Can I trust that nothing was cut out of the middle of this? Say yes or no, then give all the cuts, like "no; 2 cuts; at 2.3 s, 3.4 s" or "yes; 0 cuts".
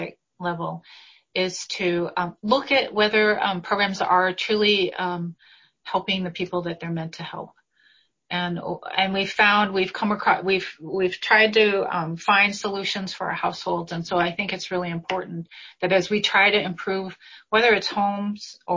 yes; 0 cuts